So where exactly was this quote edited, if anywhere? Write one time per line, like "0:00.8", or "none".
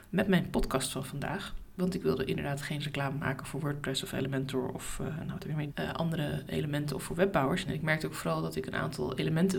0:05.7
0:07.7